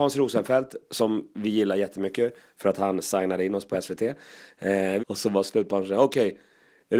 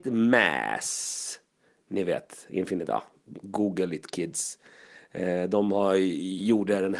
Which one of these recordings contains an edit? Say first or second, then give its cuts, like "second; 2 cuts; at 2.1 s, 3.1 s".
first; 1 cut; at 5.0 s